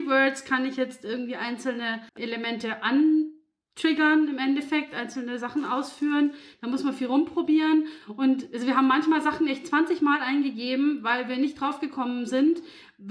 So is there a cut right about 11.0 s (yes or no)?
no